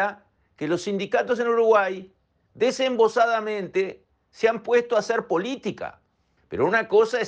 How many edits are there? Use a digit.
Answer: 1